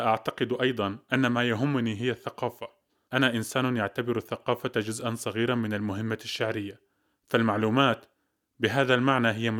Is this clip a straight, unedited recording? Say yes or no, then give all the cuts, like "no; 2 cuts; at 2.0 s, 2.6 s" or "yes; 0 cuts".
no; 1 cut; at 3.1 s